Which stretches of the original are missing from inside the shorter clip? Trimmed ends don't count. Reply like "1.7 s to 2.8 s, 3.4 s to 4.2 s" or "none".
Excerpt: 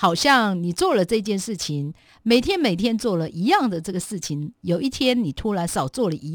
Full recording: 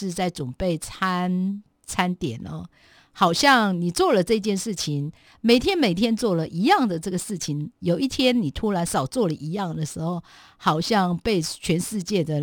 none

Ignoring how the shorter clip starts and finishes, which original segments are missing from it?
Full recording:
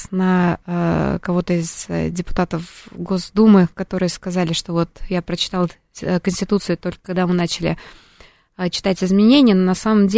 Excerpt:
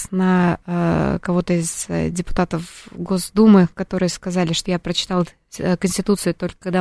4.7 s to 5.1 s

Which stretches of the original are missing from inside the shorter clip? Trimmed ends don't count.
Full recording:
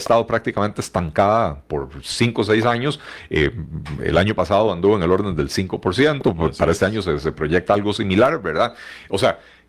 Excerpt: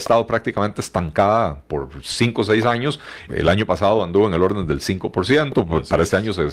3.3 s to 4.0 s

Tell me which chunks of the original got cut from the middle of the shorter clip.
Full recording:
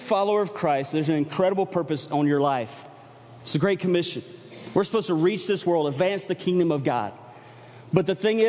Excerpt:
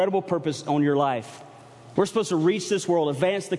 3.4 s to 4.7 s

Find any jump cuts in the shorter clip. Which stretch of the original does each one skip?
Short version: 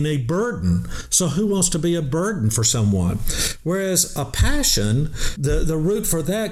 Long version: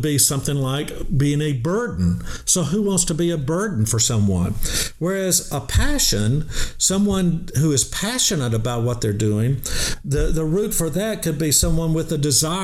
6.7 s to 10.0 s

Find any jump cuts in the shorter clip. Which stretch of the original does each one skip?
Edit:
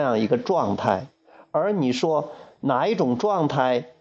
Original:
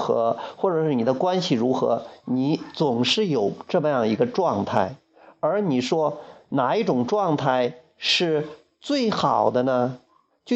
none

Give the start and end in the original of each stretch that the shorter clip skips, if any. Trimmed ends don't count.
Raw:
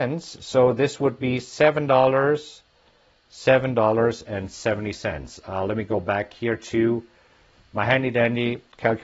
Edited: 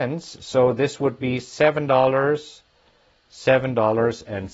none

